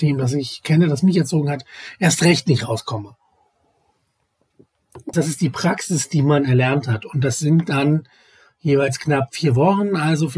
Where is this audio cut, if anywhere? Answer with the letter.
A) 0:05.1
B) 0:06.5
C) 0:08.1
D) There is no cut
A